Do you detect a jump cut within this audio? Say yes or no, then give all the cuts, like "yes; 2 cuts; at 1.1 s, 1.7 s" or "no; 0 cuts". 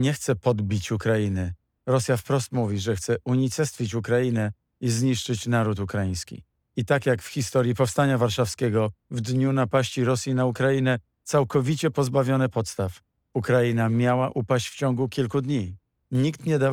yes; 1 cut; at 9.0 s